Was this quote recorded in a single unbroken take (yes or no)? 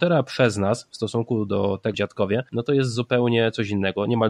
no